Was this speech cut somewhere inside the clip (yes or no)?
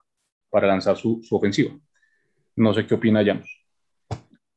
no